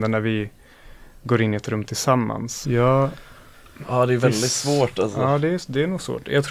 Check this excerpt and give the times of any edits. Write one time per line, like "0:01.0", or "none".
0:02.6